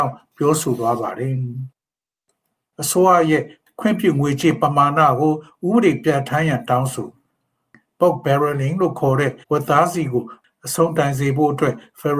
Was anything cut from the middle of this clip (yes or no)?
yes